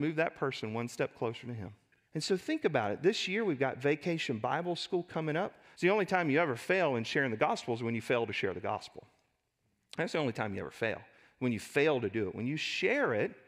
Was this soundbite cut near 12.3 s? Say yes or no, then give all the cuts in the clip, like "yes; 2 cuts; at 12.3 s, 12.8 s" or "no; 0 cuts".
no; 2 cuts; at 2.1 s, 5.7 s